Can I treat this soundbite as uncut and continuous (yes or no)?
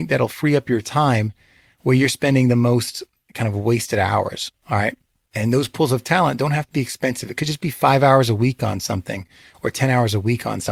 yes